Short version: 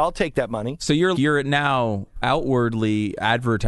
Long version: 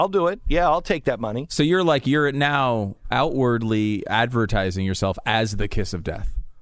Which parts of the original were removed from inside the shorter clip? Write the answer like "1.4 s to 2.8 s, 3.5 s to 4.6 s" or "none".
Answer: 1.8 s to 2.0 s

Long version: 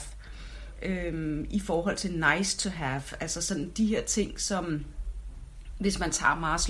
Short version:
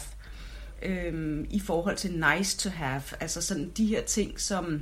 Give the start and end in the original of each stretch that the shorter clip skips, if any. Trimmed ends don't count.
none

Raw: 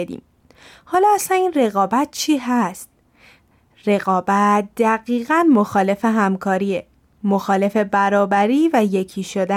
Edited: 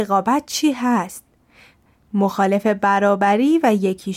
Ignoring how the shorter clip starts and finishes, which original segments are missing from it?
3.6 s to 7.1 s

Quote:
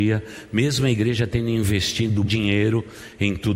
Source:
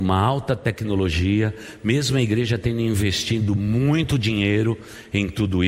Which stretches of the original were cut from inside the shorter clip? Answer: 3.6 s to 4.2 s

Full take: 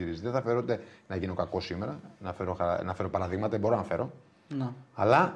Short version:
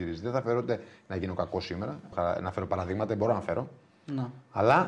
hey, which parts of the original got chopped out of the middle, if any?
2.1 s to 2.5 s

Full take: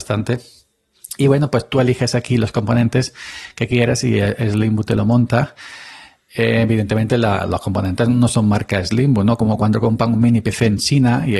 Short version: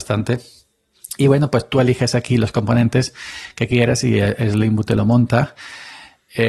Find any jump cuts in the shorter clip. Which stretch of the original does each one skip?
none

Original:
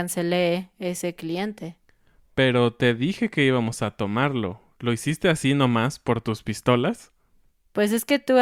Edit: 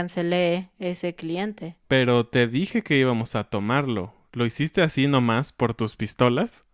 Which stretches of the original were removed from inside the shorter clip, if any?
1.8 s to 2.3 s

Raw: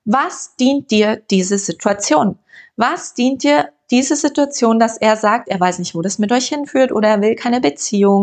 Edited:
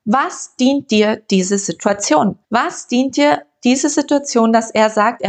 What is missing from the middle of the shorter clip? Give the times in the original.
2.4 s to 2.7 s

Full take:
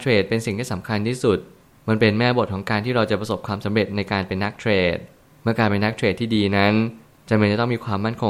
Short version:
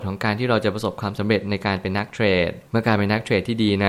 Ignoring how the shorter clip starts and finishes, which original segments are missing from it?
5.1 s to 5.4 s

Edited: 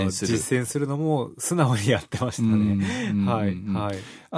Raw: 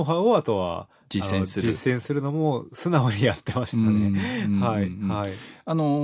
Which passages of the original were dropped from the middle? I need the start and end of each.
none

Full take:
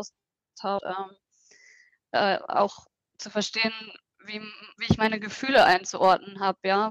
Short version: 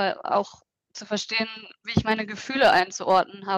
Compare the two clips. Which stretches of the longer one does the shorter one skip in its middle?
4.1 s to 4.7 s

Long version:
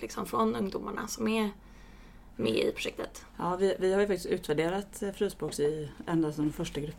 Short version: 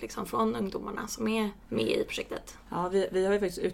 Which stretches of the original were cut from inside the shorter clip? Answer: 1.6 s to 2.3 s

